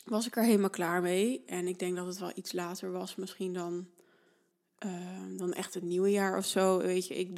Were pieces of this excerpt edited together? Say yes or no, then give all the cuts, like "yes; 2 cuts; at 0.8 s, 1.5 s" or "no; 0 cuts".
no; 0 cuts